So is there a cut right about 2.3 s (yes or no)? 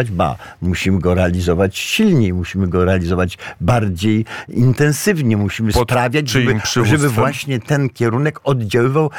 no